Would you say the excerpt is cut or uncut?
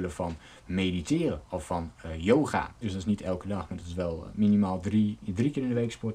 cut